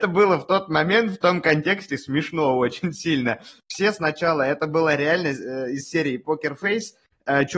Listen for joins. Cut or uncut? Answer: uncut